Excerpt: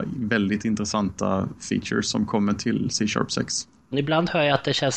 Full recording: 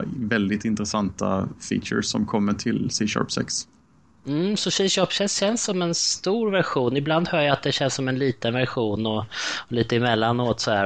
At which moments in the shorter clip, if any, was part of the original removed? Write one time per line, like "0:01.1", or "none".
0:03.9